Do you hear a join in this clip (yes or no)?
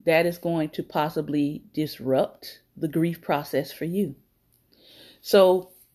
no